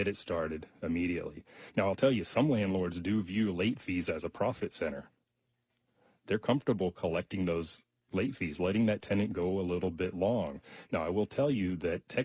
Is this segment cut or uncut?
uncut